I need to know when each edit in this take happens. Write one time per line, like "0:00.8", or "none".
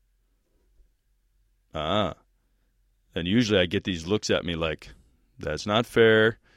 none